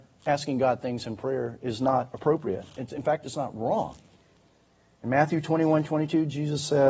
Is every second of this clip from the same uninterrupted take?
yes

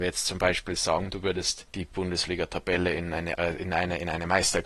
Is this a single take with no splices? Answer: yes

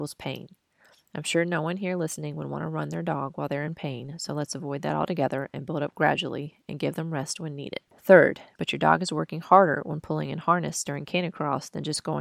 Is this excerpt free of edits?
no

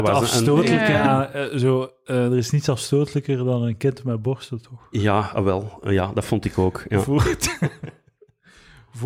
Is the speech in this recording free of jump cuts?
yes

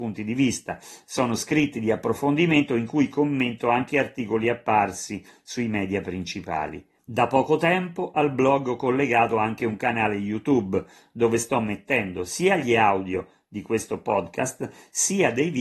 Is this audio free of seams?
yes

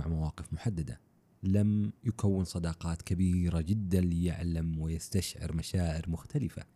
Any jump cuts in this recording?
no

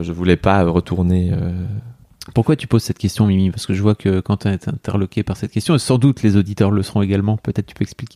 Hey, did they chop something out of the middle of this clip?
no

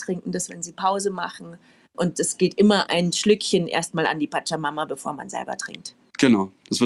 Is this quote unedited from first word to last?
yes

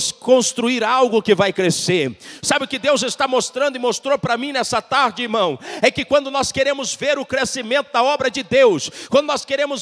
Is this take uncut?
yes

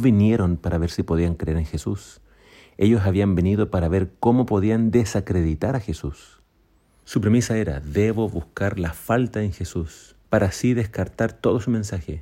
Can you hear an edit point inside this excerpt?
yes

